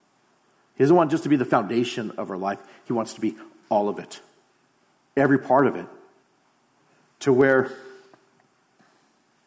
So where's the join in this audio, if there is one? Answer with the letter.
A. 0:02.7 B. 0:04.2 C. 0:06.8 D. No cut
D